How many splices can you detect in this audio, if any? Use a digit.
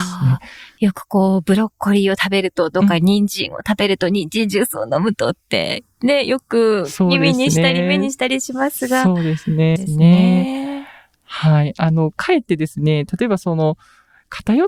1